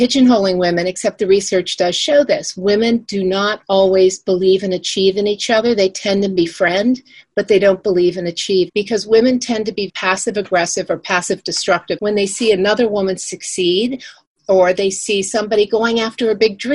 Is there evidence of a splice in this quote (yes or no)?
yes